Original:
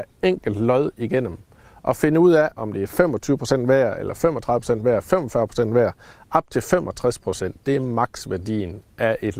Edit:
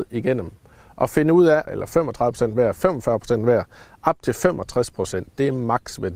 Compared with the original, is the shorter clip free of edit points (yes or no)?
no